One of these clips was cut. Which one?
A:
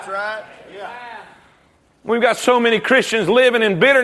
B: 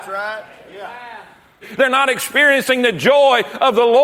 B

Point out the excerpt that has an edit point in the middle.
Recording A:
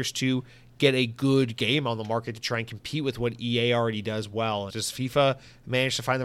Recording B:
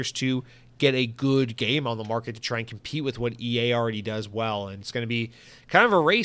A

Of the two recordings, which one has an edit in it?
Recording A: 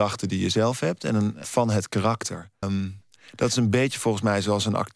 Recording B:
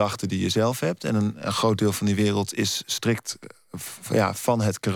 A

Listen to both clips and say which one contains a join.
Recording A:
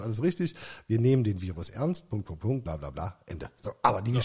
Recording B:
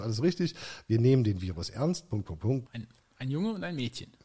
B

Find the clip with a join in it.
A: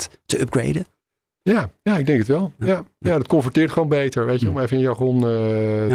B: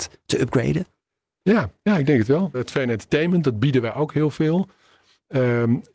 B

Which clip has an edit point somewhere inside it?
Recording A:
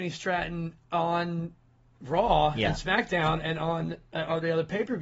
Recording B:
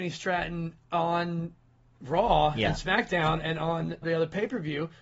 B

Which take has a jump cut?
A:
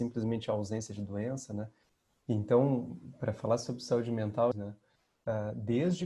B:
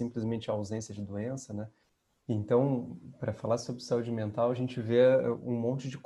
A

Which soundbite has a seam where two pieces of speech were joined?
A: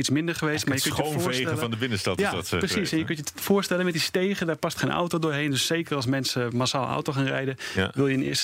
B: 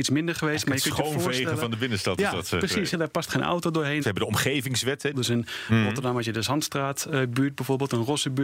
B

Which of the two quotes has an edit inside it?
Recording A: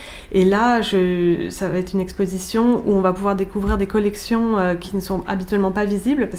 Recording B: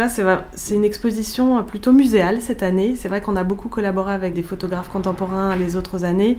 B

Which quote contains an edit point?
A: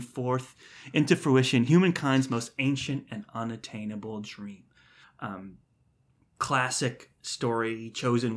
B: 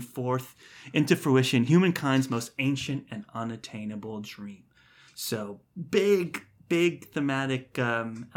A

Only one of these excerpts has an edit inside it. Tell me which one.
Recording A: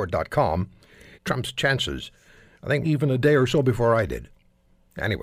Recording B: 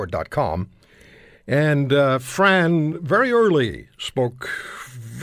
A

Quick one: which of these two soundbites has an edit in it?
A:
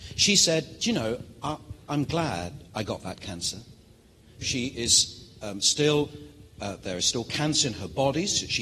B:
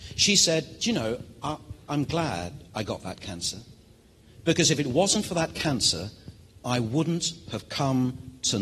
A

